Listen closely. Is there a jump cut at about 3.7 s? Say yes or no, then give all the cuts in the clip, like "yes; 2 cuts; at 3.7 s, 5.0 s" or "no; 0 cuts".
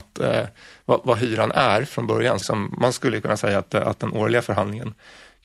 no; 1 cut; at 2.4 s